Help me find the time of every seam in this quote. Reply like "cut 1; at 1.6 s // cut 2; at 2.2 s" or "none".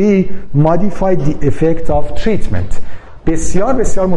none